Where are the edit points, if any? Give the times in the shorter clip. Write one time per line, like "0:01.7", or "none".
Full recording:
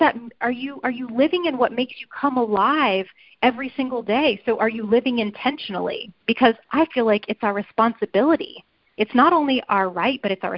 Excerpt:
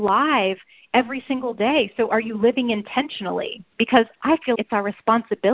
0:04.5